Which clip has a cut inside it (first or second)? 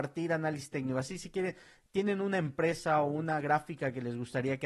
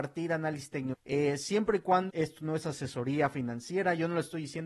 second